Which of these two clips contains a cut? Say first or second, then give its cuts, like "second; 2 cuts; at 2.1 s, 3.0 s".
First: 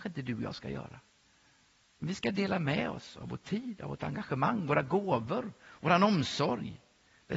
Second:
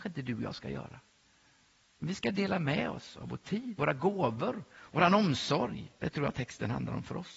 second; 2 cuts; at 3.8 s, 6.0 s